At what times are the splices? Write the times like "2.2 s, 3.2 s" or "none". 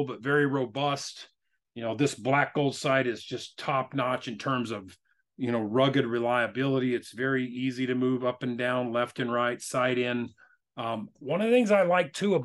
none